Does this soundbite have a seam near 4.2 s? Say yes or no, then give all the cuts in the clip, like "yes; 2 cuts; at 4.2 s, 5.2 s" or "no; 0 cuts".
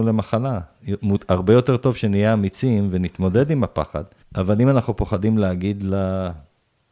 yes; 1 cut; at 4.2 s